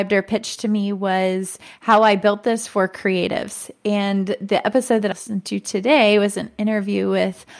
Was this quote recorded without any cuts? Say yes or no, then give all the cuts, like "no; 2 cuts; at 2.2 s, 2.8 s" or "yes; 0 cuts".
no; 1 cut; at 5.1 s